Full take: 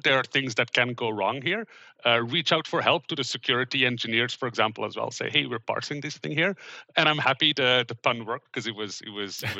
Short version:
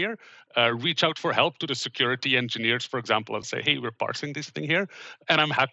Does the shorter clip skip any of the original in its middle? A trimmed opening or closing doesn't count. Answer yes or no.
yes